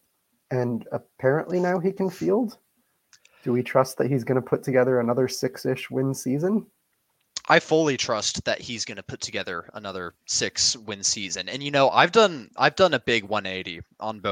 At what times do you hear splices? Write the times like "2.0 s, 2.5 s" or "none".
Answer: none

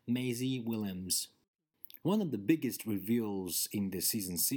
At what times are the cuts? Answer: 2.0 s

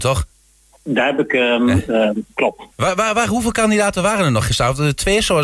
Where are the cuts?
2.7 s

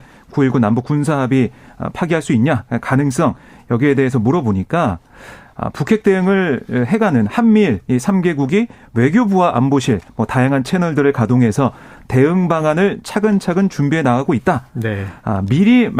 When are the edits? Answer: none

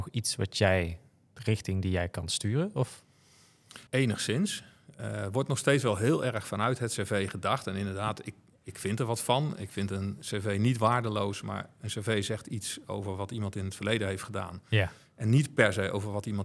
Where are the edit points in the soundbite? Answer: 3.9 s

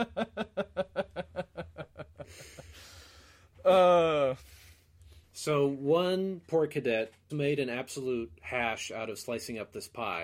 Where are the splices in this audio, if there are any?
5.2 s, 7.3 s

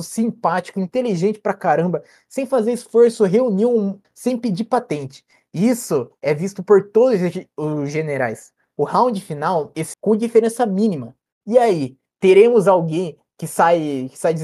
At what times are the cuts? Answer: 4.0 s, 9.9 s

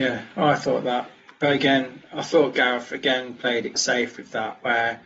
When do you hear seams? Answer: 3.8 s

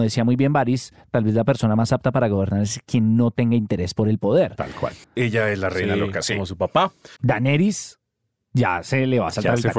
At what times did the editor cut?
5.0 s, 7.2 s

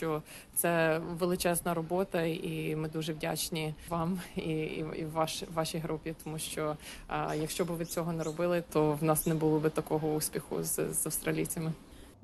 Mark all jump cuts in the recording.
none

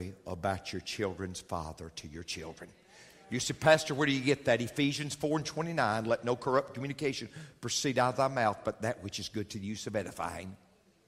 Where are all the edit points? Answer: none

